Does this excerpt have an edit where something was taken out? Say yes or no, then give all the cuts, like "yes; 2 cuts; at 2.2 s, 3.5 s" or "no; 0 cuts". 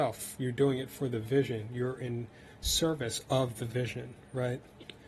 no; 0 cuts